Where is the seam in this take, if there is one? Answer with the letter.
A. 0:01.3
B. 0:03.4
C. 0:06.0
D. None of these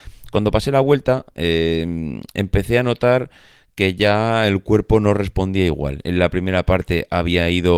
C